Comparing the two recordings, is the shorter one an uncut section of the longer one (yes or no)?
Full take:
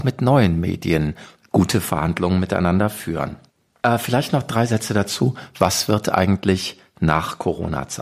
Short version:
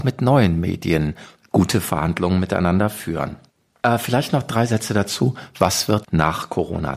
no